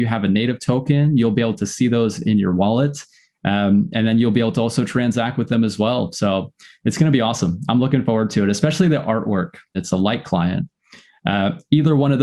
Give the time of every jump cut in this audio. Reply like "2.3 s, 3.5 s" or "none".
9.7 s